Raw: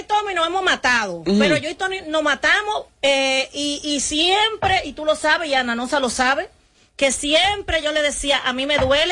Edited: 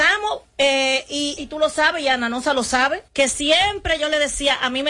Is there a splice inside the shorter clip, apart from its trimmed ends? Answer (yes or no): yes